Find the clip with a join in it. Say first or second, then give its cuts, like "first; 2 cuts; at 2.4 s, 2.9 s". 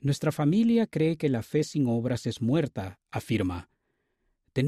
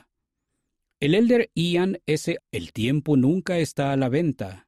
second; 2 cuts; at 0.9 s, 2.4 s